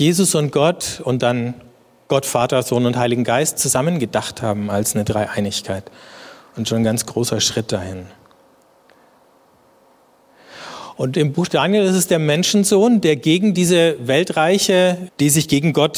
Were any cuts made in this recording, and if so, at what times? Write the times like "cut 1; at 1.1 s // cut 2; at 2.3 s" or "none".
cut 1; at 15.1 s